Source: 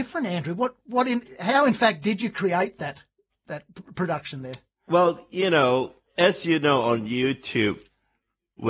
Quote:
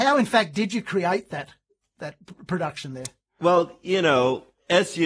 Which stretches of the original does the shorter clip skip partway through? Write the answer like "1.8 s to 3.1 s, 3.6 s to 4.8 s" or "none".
none